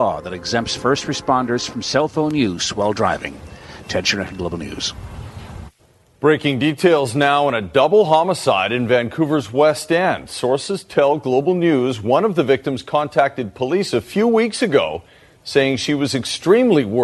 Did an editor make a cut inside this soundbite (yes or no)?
no